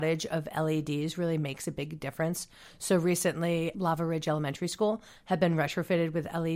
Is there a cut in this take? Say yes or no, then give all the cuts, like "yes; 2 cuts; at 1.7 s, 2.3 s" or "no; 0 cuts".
yes; 1 cut; at 3.7 s